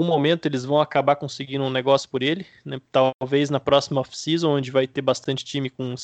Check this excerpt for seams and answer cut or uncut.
uncut